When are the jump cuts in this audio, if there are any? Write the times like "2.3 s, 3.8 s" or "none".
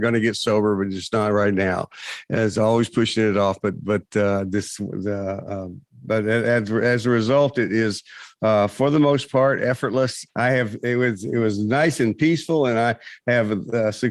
10.3 s